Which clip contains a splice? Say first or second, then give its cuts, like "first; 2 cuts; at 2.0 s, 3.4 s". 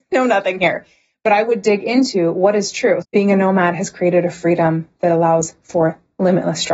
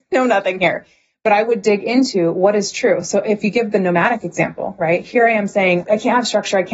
first; 1 cut; at 3.0 s